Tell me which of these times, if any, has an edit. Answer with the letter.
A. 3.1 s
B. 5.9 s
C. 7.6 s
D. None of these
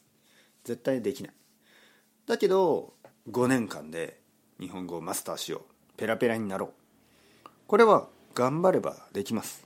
A